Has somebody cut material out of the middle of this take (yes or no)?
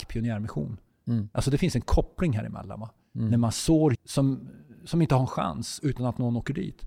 yes